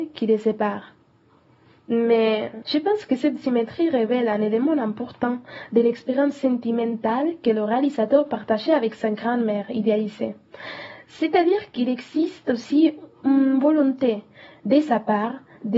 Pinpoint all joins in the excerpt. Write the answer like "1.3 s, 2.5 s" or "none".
2.6 s